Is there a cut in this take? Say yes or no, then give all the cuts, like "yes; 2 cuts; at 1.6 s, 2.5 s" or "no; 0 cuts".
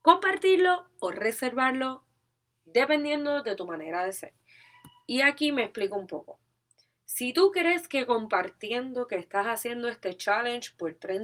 no; 0 cuts